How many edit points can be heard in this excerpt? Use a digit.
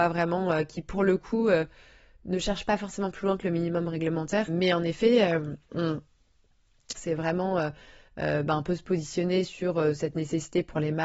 2